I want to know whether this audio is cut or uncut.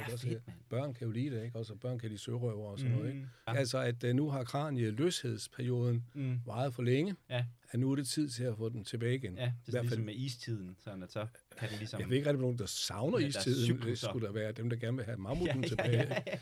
cut